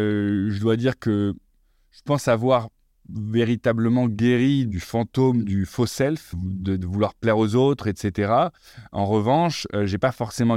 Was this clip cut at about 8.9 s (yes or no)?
no